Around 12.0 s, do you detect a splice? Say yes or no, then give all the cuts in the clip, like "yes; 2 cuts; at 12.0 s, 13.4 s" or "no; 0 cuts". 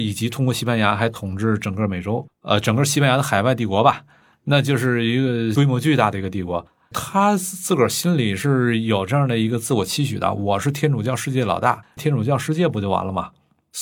yes; 1 cut; at 12.0 s